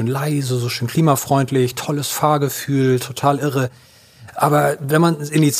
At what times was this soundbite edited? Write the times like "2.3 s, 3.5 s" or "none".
none